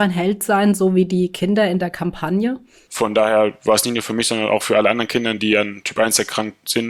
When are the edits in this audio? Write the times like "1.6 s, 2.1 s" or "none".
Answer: 2.8 s